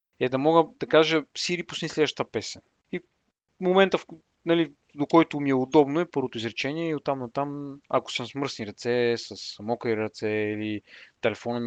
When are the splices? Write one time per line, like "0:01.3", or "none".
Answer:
0:02.8
0:06.1